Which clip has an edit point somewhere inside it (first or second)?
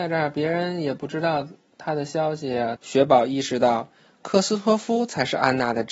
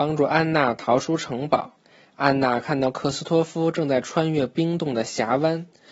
first